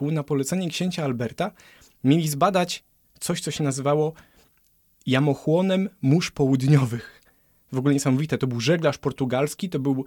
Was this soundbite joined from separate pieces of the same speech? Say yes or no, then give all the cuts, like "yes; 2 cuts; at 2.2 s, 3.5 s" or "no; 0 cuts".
no; 0 cuts